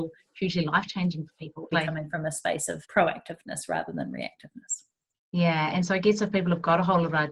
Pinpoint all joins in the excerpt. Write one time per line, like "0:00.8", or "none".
0:01.7
0:02.8